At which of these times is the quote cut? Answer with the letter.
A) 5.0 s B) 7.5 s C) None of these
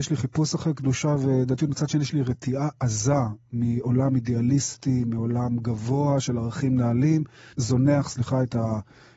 B